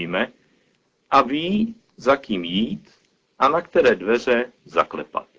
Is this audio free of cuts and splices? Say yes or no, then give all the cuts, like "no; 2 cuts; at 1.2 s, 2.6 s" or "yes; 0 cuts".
yes; 0 cuts